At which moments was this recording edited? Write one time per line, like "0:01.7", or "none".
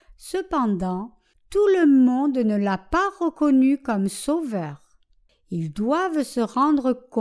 0:01.3
0:05.3